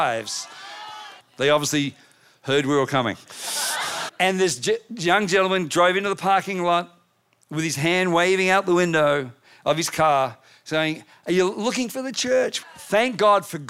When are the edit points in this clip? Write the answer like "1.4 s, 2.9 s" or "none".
1.2 s, 4.1 s, 12.6 s